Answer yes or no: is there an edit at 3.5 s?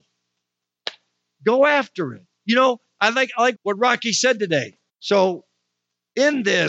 yes